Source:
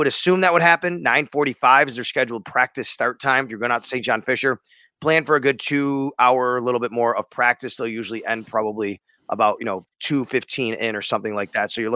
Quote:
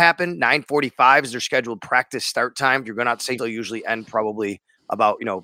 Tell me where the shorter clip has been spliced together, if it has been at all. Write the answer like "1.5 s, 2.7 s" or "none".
3.4 s